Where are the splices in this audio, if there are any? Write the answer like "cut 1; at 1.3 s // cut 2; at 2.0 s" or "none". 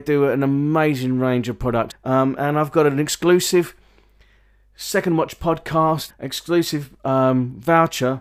cut 1; at 1.9 s // cut 2; at 6.1 s